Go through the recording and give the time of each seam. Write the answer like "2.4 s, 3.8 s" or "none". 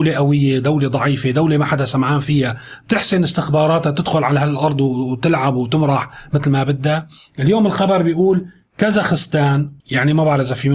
9.8 s